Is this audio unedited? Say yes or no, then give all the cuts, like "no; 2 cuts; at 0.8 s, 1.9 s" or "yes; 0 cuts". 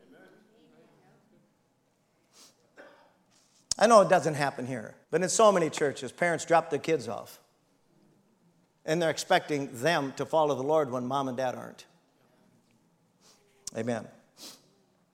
no; 1 cut; at 5.0 s